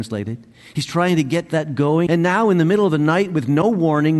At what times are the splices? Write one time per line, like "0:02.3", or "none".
0:02.1